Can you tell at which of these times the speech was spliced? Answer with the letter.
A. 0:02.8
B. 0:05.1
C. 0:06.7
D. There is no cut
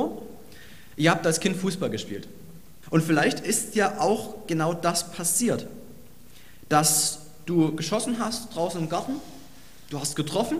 A